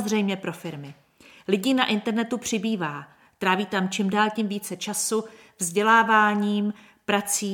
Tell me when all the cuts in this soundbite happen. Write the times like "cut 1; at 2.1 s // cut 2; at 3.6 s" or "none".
none